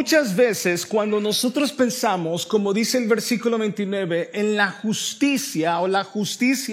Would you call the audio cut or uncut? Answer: uncut